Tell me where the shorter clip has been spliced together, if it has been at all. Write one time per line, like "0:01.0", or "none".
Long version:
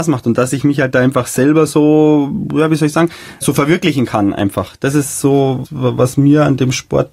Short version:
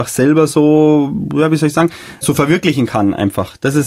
none

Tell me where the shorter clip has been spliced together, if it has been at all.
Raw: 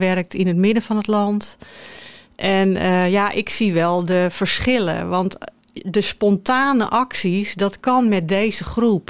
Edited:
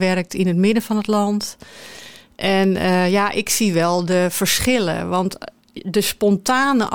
none

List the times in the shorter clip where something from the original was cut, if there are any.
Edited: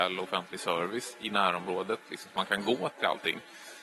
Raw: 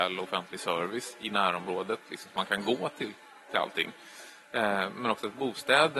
0:02.9

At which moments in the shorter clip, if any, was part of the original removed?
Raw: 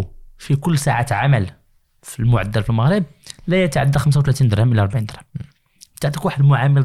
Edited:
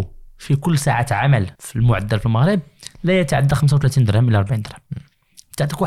0:01.5

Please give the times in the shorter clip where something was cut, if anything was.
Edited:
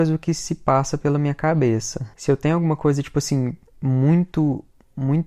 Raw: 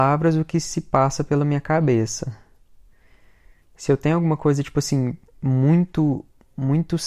0:02.1

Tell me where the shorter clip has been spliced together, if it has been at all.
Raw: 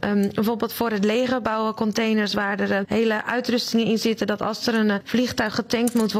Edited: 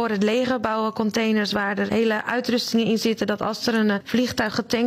0:01.9

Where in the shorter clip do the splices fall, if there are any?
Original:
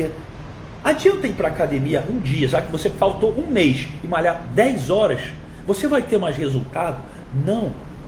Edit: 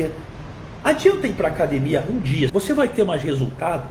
0:02.5

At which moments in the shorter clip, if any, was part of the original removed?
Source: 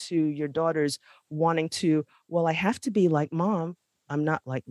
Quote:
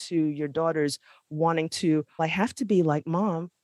0:02.2

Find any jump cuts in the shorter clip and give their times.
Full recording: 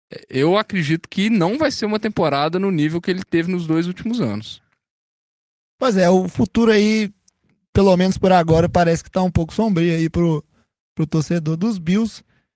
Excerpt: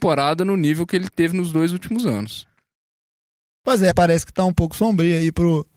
0:03.9

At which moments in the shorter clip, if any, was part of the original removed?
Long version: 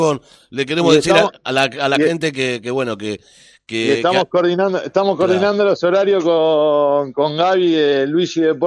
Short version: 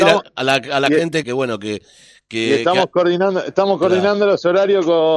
0:01.2

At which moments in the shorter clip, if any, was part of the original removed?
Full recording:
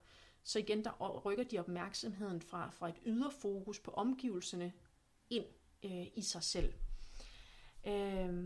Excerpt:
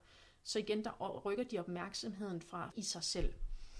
0:02.7

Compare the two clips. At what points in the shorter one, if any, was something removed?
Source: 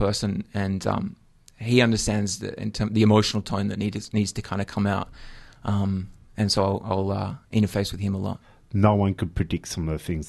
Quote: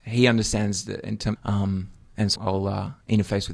0:01.3
0:02.4

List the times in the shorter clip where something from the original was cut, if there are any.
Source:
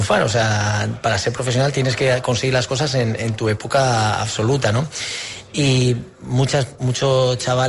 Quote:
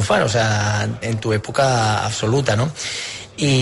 0:01.0

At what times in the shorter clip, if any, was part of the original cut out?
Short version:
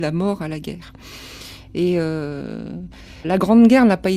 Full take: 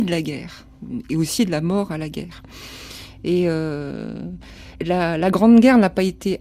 0:03.2

